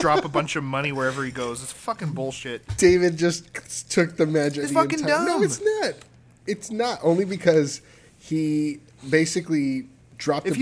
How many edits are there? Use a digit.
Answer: 1